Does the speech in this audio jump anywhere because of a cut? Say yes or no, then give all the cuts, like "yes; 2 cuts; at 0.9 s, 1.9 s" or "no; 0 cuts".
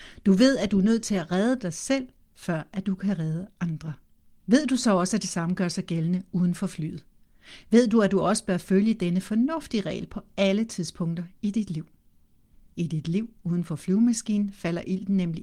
yes; 1 cut; at 4.4 s